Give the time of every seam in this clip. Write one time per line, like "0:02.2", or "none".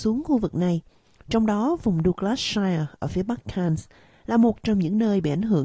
none